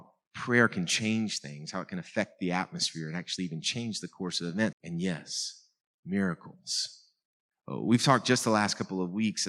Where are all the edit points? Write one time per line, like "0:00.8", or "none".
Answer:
0:04.7
0:07.5